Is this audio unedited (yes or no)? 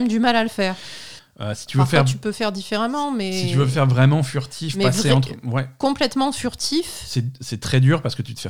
no